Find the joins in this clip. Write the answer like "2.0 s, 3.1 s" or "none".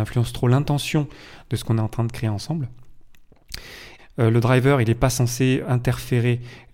4.0 s, 5.6 s

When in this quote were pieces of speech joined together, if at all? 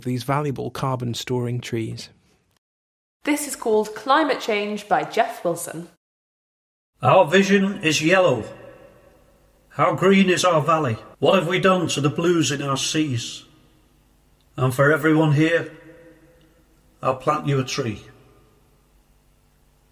11.1 s, 14.4 s

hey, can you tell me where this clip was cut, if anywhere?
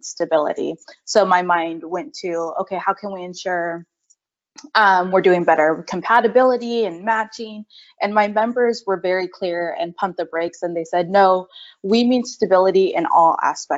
none

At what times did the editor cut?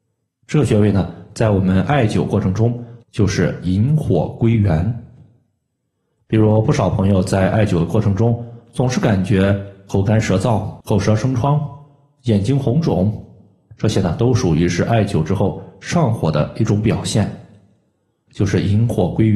3.0 s, 10.8 s, 18.3 s

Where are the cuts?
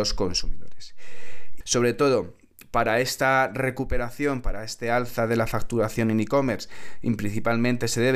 1.6 s

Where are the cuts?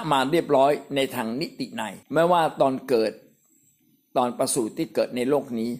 2.0 s

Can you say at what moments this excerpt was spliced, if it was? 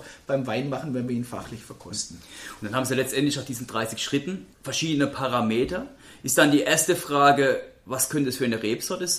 4.5 s

